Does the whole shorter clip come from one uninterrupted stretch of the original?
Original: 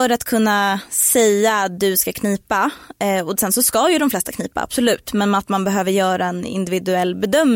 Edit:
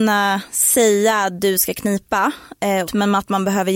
no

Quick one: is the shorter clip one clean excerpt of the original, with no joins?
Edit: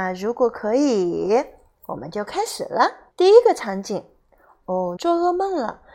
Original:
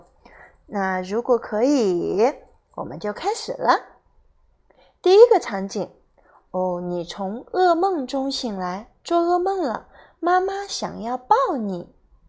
no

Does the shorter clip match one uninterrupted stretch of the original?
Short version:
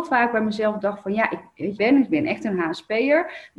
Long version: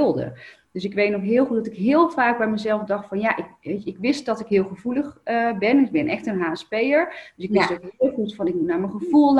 no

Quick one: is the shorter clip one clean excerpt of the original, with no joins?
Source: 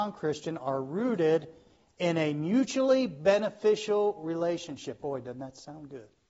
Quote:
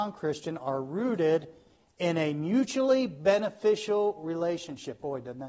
yes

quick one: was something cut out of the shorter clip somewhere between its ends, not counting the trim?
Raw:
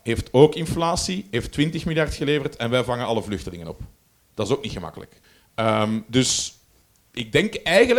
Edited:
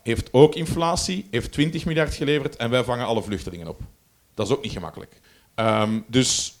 no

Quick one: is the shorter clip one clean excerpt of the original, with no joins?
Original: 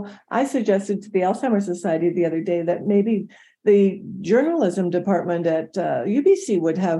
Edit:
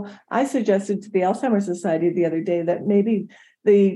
yes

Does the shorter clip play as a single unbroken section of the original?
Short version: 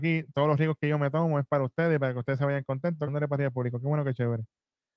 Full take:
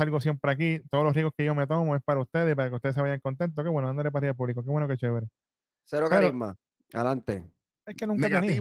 no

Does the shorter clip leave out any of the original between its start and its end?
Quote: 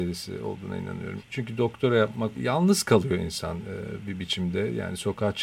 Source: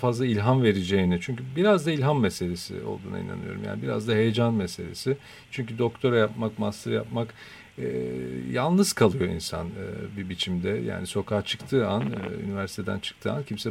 yes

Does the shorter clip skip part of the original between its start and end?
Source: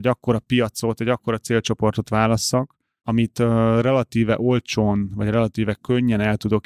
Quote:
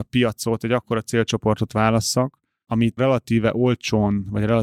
yes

